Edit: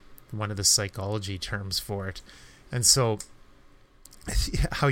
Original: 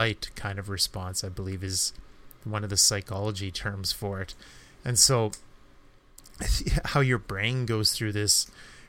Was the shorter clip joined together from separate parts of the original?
no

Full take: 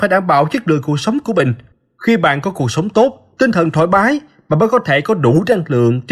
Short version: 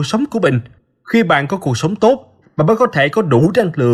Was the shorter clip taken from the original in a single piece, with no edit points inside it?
no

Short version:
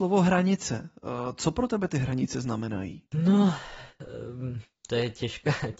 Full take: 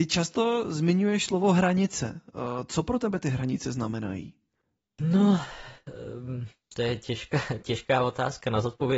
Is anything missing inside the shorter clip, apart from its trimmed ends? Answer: yes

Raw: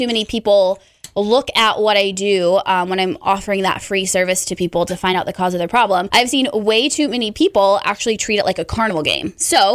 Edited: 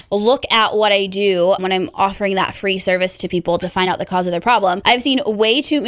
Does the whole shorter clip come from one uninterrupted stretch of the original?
no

